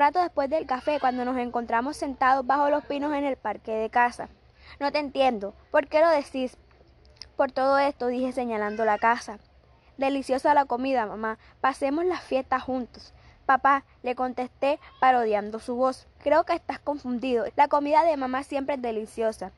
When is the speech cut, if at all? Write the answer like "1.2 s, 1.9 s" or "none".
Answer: 16.1 s, 17.5 s